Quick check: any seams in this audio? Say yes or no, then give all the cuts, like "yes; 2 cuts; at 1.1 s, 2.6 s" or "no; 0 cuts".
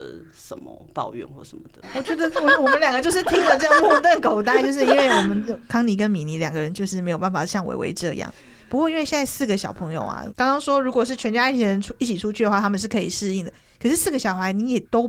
no; 0 cuts